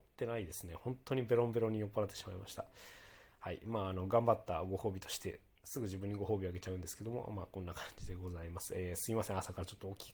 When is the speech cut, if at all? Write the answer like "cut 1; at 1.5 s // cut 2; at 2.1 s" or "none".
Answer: none